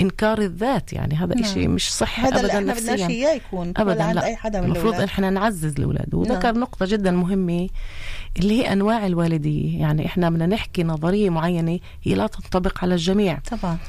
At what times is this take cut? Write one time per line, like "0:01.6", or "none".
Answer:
none